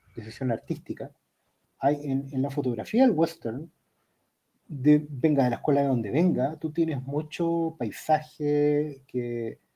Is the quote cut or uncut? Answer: cut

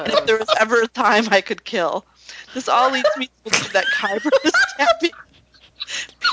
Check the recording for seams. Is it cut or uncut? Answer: uncut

